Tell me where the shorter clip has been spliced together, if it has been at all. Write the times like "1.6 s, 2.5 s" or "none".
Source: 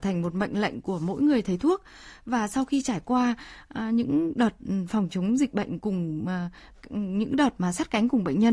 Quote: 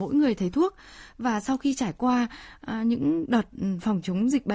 none